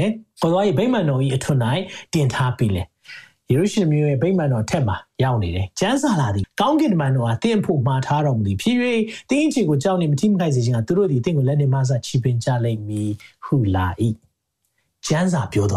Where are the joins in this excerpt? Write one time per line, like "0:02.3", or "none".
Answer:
0:06.4